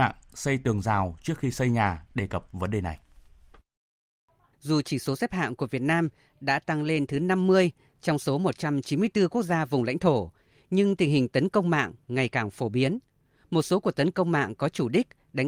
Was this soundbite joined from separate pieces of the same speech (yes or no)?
yes